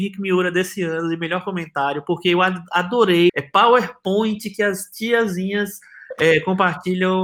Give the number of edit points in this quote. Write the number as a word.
one